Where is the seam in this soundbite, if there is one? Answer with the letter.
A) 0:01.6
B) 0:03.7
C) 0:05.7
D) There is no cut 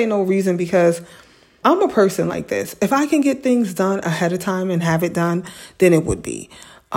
A